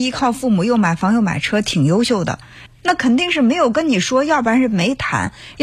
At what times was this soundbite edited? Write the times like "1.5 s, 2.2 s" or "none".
2.7 s